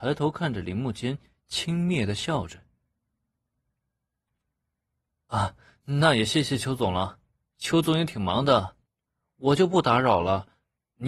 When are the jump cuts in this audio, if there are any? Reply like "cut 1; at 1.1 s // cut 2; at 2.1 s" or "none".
none